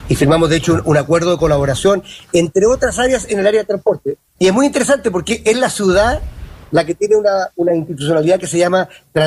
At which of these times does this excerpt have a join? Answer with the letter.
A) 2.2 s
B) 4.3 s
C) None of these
B